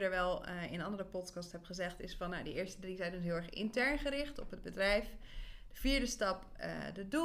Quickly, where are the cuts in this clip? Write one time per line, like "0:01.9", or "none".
none